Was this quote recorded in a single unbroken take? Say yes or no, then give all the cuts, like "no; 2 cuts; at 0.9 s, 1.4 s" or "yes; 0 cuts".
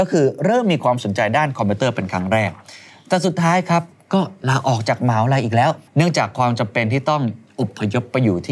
no; 1 cut; at 5.9 s